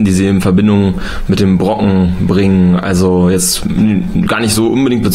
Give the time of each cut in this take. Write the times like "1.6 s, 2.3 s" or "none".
none